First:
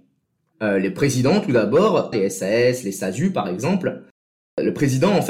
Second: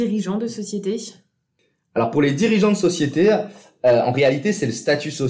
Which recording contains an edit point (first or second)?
first